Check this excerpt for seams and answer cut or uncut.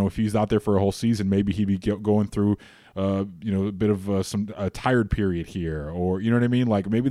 uncut